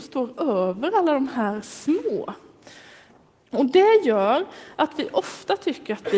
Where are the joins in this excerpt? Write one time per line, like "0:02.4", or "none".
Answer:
0:03.4